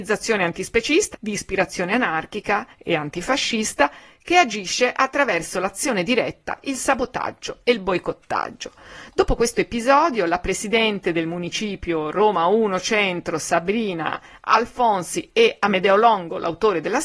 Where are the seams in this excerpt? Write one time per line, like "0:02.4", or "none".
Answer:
0:01.1

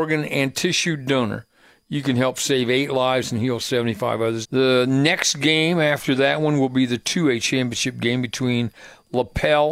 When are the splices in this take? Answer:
0:04.4

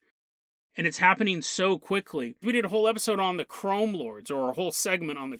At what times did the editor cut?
0:02.4

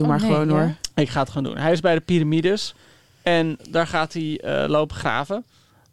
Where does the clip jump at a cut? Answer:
0:03.6

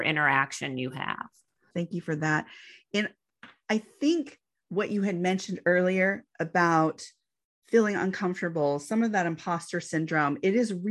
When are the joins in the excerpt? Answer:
0:01.7

